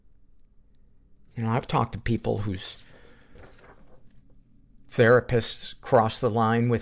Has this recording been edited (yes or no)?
yes